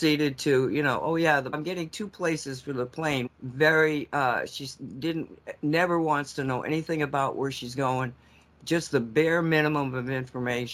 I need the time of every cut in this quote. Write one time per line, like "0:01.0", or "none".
0:01.5
0:03.3

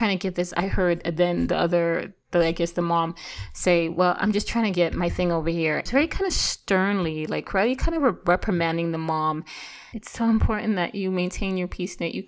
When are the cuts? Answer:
0:05.9
0:09.9

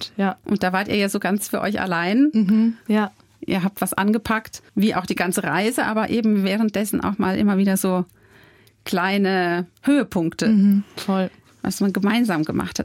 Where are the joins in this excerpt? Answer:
0:02.9
0:04.7

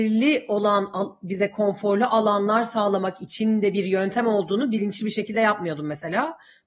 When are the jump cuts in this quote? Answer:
none

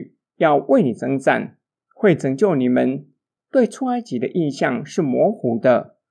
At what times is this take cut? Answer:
0:03.4

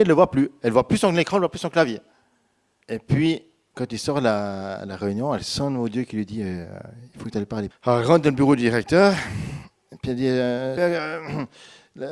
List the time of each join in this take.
0:02.8
0:07.7
0:10.8

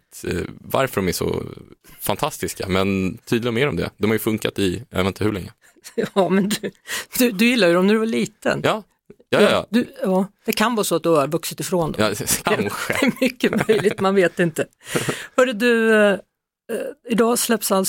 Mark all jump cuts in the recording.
0:12.4

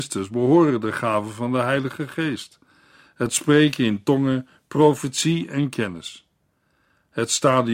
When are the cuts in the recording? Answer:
none

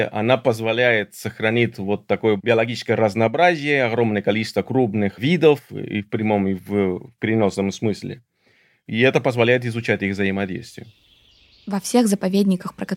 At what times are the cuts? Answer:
none

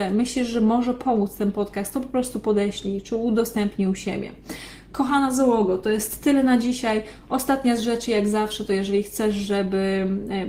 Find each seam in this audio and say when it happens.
none

